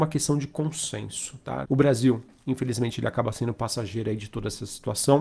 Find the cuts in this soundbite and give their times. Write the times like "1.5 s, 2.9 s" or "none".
1.6 s